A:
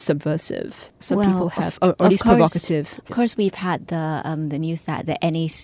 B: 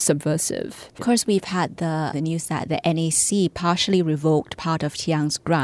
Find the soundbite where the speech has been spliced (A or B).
B